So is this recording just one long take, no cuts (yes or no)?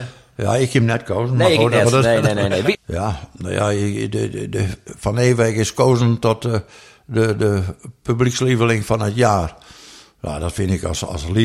no